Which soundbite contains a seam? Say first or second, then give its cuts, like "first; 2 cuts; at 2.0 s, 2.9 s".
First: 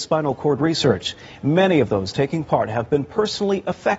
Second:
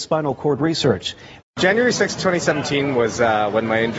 second; 1 cut; at 1.4 s